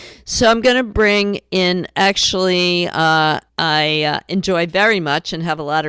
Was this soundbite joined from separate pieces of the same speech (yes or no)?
yes